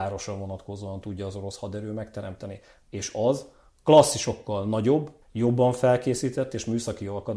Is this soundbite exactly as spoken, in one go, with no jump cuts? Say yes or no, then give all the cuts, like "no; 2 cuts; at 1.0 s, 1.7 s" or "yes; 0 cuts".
no; 2 cuts; at 2.8 s, 5.2 s